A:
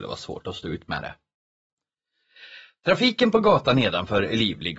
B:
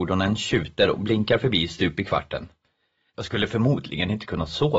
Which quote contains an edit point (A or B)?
B